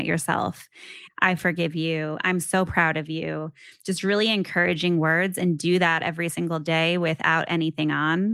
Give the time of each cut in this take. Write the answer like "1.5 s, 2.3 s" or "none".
1.1 s